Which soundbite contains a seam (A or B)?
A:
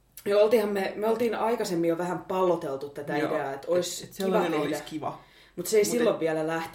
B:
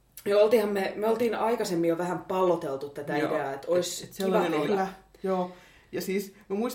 B